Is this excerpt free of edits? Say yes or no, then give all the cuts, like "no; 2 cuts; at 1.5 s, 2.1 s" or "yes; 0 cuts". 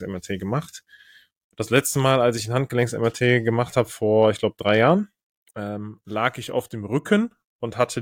yes; 0 cuts